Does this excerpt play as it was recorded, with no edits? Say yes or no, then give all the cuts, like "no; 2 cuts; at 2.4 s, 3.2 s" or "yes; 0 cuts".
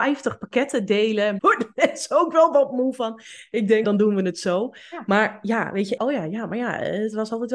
no; 3 cuts; at 1.4 s, 3.8 s, 6.0 s